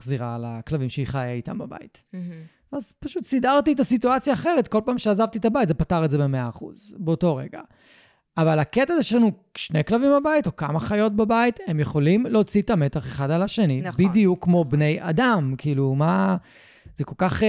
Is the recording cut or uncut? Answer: uncut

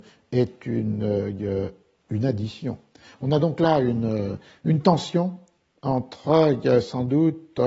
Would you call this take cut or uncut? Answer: uncut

